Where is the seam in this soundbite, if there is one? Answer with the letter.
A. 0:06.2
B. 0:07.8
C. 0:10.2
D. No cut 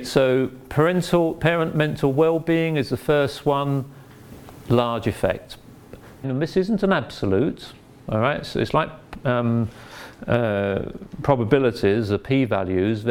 A